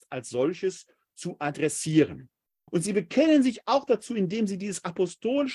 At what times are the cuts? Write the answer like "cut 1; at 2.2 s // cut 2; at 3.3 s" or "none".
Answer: cut 1; at 2.7 s